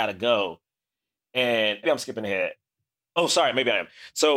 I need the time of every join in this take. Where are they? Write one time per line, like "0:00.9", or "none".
0:01.8